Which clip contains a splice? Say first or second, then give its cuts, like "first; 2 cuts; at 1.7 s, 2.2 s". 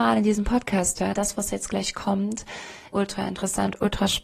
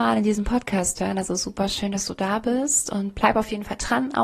first; 2 cuts; at 1.1 s, 2.9 s